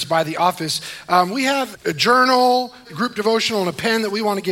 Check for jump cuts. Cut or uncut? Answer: cut